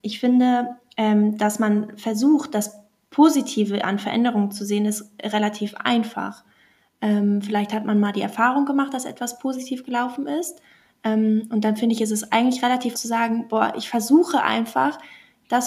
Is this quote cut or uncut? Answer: cut